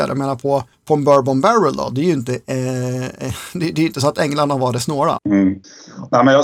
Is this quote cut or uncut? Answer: cut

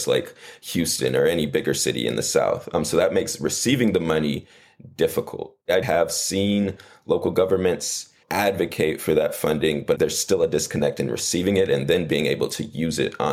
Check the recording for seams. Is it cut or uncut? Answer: cut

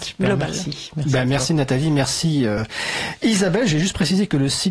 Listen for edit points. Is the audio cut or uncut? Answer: uncut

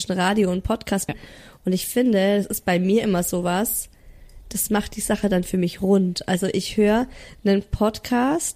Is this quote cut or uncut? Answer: cut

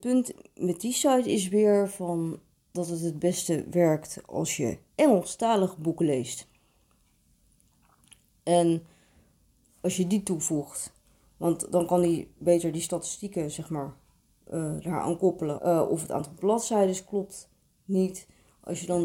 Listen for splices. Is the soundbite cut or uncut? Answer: cut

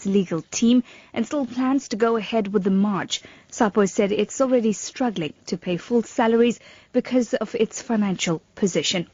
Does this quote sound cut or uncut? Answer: uncut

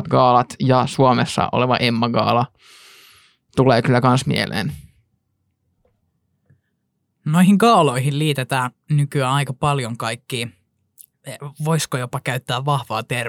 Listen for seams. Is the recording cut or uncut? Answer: uncut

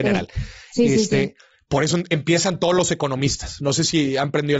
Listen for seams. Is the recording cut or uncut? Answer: uncut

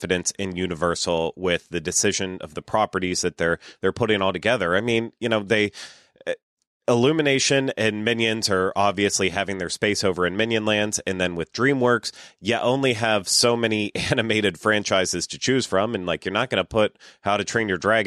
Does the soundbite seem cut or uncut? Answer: uncut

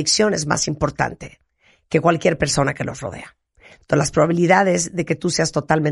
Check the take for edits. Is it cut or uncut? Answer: uncut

